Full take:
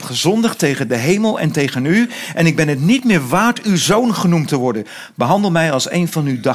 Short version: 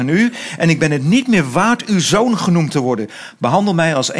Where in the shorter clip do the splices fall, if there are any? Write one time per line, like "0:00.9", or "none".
none